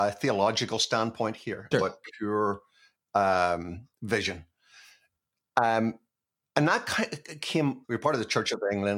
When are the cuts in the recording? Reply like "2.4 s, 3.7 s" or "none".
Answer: 1.7 s, 7.8 s